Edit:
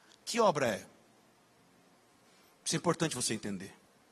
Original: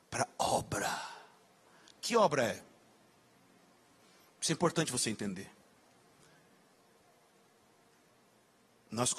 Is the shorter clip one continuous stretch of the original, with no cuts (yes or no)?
yes